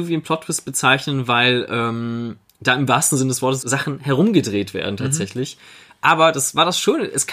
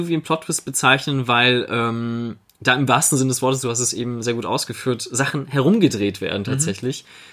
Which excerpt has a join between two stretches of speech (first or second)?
first